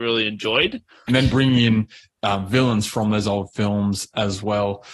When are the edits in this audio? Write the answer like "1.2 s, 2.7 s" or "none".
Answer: 1.1 s